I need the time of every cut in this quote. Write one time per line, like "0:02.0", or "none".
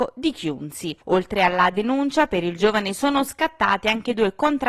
0:01.0